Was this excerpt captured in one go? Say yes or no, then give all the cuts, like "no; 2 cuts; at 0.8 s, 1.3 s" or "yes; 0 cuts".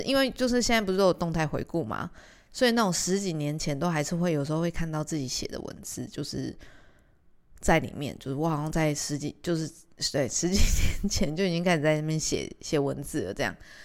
yes; 0 cuts